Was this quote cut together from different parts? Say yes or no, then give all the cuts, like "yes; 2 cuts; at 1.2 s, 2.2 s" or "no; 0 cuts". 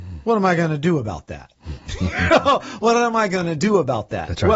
no; 0 cuts